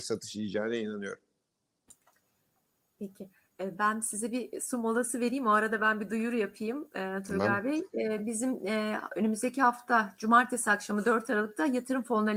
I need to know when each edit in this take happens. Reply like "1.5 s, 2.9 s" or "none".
none